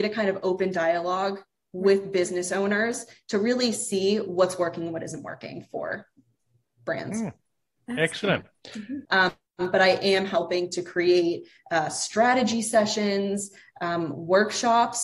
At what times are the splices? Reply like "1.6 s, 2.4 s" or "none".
9.1 s